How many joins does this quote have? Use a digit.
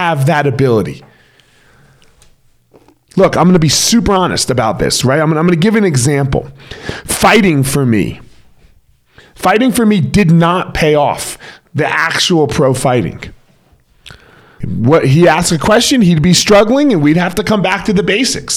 1